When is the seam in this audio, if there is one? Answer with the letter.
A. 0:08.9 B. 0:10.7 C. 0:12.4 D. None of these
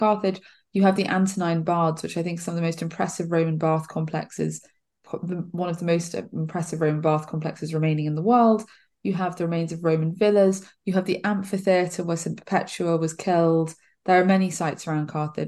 D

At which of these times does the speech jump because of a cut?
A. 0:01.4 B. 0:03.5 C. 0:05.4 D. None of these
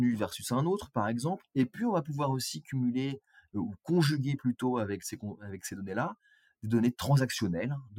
A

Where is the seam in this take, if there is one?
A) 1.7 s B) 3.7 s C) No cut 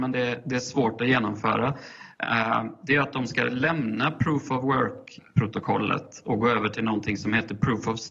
C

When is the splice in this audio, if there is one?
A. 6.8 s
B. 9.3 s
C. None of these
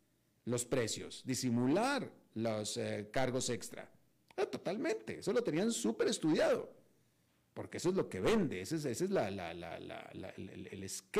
C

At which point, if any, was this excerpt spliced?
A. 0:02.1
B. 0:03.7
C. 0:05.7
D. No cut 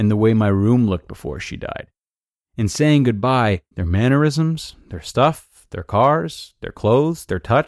B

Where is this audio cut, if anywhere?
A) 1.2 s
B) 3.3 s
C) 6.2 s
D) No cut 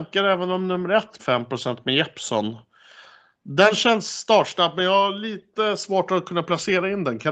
A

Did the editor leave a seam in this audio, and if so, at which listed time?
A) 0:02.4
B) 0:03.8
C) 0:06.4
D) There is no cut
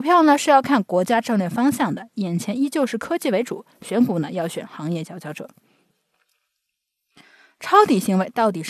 D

